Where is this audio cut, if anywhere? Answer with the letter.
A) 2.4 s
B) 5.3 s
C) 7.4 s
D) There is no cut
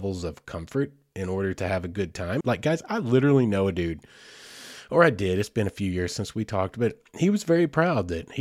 A